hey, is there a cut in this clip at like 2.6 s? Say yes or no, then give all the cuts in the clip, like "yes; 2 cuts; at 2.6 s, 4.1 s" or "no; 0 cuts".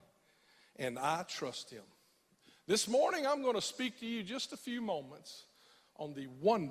no; 0 cuts